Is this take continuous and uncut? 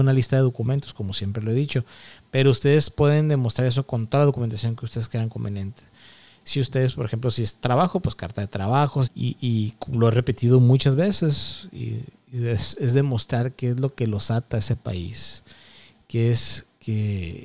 no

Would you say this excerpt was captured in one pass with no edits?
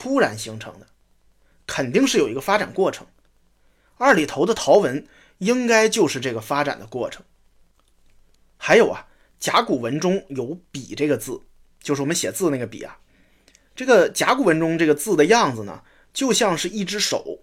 yes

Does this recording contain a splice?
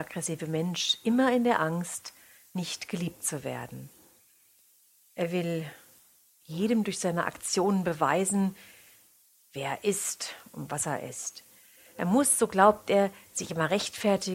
no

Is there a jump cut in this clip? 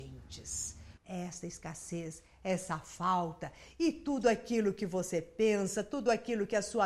yes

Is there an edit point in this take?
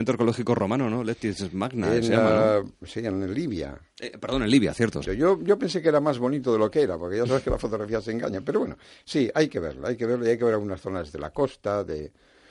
yes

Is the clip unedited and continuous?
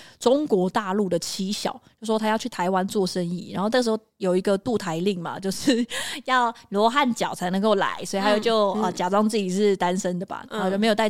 yes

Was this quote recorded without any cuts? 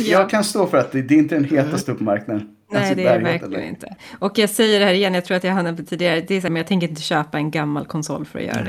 no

